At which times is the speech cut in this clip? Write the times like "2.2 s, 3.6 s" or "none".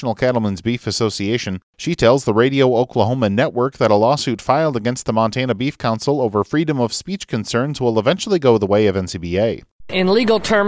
none

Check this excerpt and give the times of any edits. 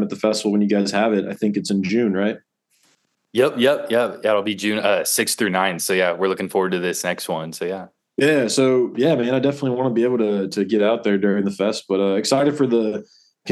none

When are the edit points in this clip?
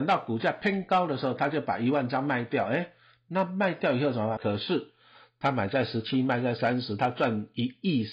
4.4 s

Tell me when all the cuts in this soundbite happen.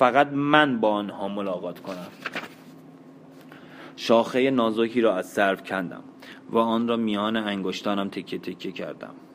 none

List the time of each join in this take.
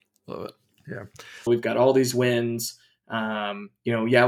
1.5 s

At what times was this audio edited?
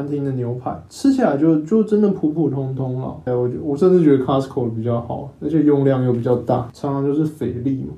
3.3 s, 6.7 s

